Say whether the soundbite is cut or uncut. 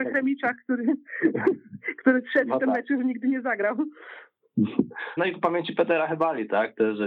cut